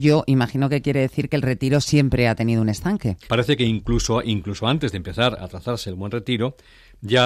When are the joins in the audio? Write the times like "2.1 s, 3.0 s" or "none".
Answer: 3.3 s